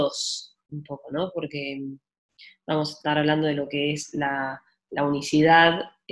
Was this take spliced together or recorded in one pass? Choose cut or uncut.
uncut